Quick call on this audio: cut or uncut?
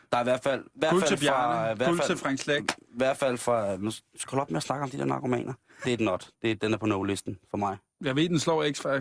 cut